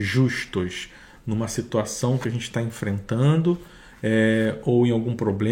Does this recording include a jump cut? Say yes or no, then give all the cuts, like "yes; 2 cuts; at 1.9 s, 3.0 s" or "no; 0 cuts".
no; 0 cuts